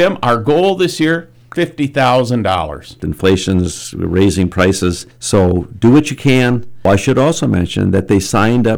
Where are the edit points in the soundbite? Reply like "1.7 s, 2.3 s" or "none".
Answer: 3.0 s